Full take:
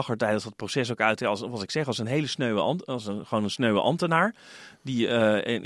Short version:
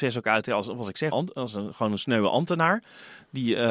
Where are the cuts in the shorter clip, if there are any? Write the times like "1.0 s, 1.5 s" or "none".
1.1 s